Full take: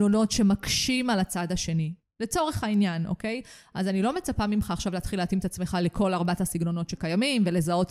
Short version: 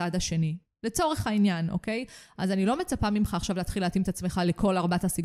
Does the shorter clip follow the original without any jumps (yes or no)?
yes